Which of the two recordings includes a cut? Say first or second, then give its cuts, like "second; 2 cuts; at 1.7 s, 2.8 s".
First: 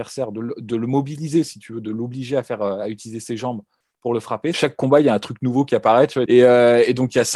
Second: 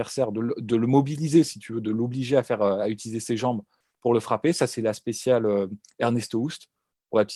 first; 2 cuts; at 4.5 s, 6.3 s